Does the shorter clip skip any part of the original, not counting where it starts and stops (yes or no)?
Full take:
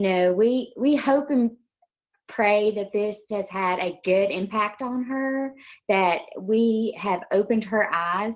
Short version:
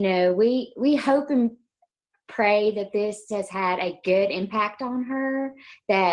no